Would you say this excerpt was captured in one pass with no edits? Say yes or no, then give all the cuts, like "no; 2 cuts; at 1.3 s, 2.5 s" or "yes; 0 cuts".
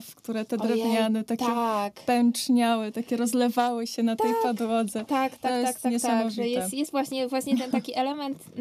yes; 0 cuts